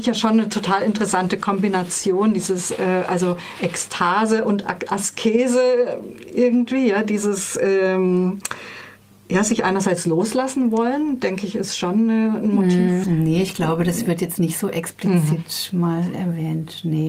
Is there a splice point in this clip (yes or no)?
yes